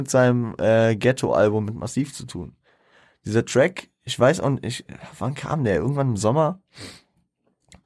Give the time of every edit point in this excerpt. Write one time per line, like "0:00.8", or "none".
none